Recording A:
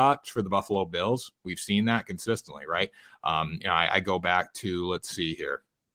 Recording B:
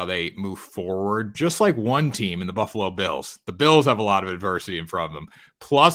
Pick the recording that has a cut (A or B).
B